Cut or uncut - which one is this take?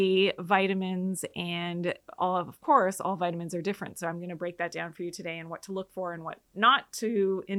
uncut